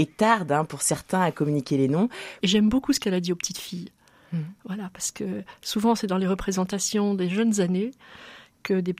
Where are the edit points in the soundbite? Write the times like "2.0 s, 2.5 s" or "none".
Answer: 2.4 s